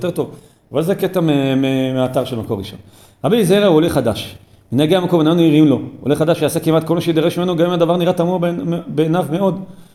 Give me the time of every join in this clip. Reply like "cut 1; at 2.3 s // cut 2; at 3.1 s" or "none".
none